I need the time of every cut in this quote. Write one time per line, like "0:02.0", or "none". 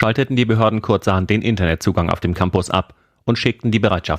none